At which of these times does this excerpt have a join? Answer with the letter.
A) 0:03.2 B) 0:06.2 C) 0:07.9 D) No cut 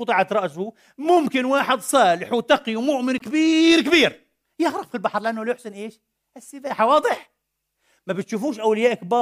D